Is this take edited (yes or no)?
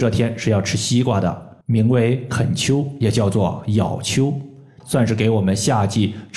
yes